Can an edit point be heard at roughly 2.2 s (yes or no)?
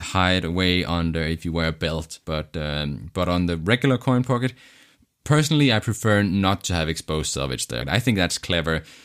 yes